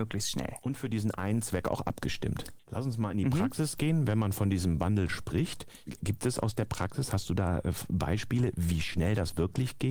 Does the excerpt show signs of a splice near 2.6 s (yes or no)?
yes